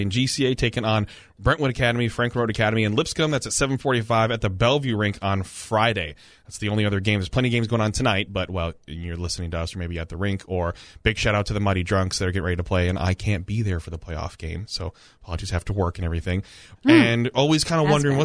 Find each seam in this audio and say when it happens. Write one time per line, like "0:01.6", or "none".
0:16.8